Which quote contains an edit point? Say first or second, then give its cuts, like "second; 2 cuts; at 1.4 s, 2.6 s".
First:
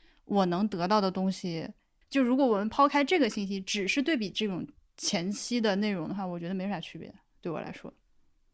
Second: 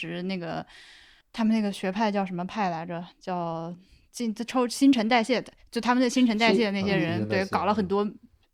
first; 1 cut; at 2.0 s